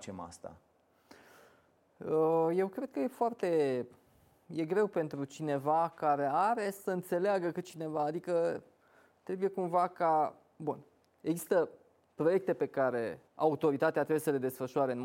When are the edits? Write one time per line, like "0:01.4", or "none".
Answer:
0:13.3